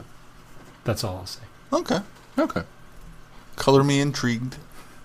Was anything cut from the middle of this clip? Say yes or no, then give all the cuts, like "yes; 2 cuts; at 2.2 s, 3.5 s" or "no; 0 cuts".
no; 0 cuts